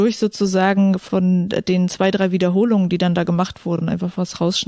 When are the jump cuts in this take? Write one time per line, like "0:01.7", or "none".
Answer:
none